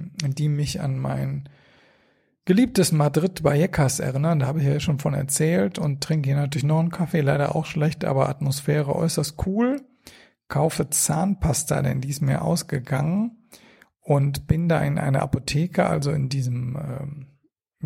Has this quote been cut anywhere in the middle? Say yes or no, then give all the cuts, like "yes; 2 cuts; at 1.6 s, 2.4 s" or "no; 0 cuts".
no; 0 cuts